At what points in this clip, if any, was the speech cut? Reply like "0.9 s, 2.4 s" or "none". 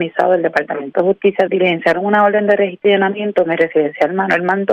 1.5 s